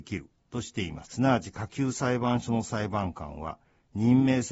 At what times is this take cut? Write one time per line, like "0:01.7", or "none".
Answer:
0:01.0